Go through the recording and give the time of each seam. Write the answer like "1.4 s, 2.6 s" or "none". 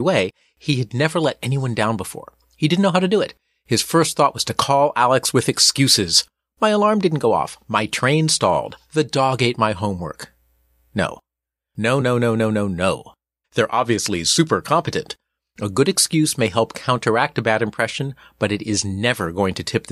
12.0 s, 13.4 s